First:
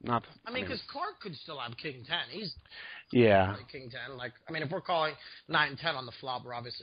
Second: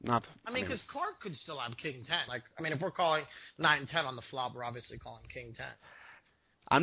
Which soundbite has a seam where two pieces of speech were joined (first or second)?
second